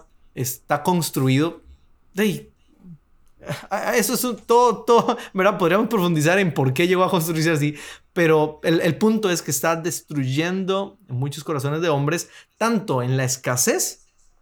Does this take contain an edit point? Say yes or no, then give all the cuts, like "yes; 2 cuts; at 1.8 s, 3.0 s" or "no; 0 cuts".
no; 0 cuts